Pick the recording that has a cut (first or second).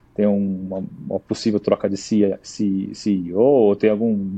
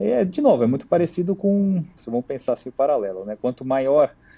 second